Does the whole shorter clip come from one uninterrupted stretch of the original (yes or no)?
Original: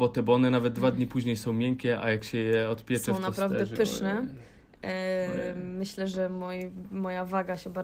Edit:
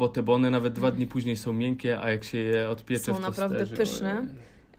yes